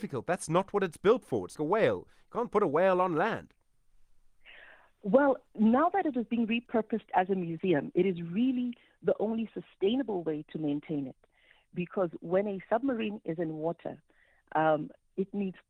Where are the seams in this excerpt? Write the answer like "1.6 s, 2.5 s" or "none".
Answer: 1.6 s